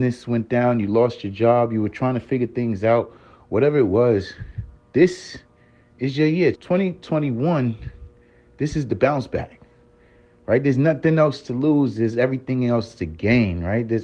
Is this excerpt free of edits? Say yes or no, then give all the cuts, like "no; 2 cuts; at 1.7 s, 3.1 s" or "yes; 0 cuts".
no; 1 cut; at 6.5 s